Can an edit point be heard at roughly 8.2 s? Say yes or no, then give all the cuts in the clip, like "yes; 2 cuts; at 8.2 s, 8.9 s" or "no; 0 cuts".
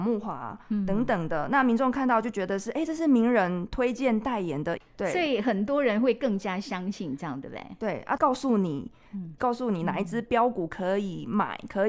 yes; 3 cuts; at 4.8 s, 8.2 s, 9.4 s